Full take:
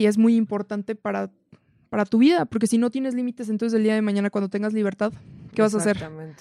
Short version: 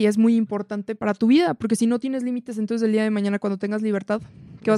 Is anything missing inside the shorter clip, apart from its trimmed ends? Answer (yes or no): yes